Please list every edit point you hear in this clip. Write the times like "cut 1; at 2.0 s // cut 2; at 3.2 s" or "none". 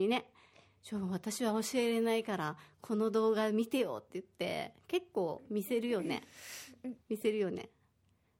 cut 1; at 7.0 s

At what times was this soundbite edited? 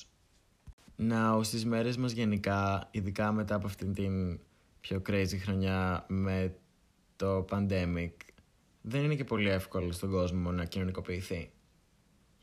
cut 1; at 8.7 s

